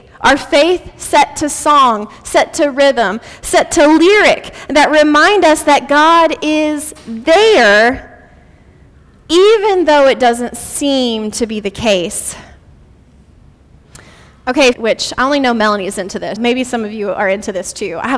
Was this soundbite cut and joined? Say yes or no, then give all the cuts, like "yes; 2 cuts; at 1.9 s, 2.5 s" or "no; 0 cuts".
yes; 2 cuts; at 14.7 s, 16.4 s